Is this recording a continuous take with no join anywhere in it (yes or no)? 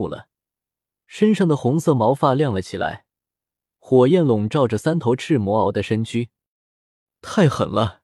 yes